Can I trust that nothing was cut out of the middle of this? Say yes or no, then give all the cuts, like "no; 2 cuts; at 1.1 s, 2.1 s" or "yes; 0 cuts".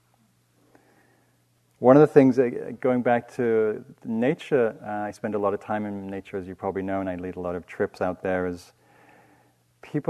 yes; 0 cuts